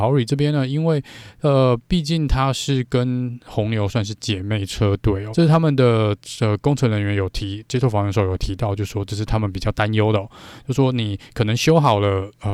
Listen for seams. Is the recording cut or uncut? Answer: cut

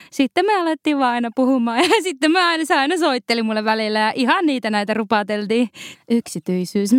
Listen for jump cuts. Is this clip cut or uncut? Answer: cut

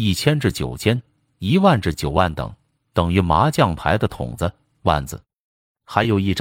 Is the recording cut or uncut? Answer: cut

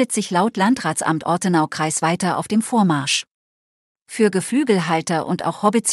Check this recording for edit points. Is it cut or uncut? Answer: uncut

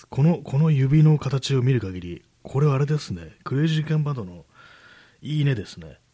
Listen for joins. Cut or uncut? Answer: uncut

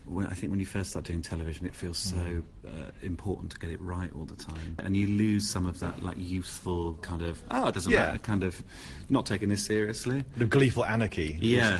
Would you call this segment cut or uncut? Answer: cut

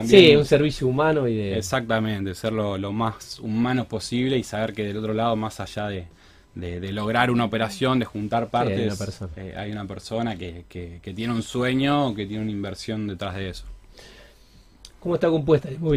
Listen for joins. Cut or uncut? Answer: uncut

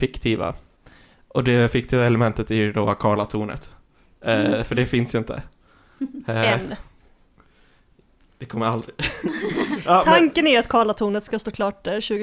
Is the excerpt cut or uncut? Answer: uncut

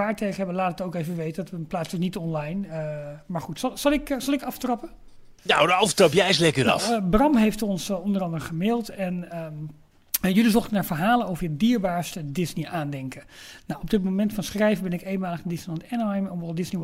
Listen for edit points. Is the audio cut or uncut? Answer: cut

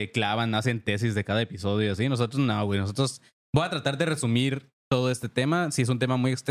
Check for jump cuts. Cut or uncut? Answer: uncut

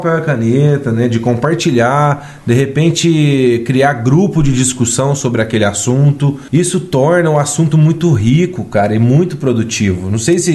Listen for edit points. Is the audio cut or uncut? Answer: uncut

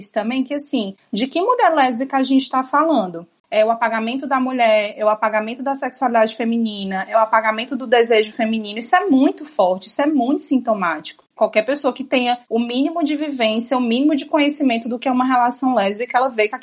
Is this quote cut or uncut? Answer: cut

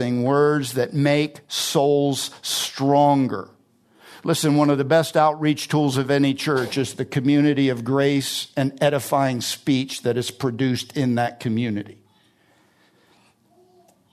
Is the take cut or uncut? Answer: uncut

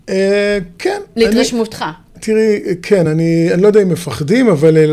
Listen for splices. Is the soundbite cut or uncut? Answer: uncut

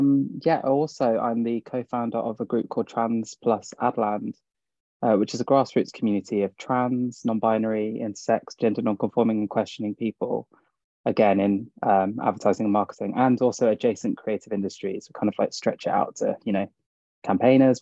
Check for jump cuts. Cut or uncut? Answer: uncut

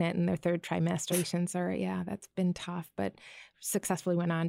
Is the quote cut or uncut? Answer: cut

